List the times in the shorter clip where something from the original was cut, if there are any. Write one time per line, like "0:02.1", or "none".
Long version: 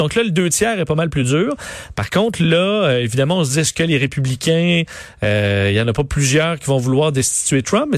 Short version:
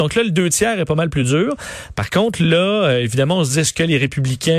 none